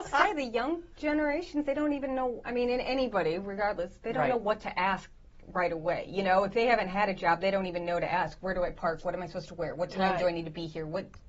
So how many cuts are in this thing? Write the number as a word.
zero